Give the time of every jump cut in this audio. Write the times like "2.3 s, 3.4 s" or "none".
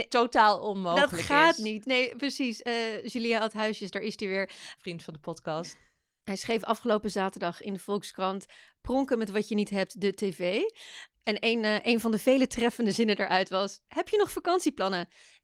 13.9 s